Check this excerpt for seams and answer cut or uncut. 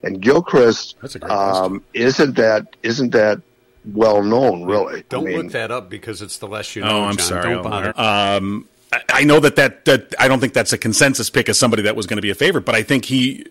cut